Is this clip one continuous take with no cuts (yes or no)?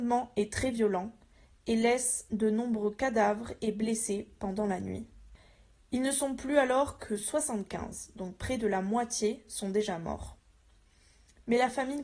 yes